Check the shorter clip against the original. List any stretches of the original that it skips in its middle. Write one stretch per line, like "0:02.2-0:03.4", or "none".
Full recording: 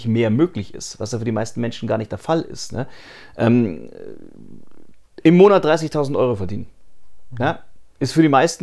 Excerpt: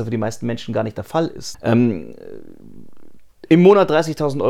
0:02.7-0:03.3